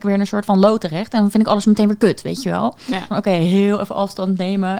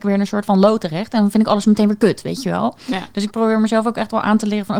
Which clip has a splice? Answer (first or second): first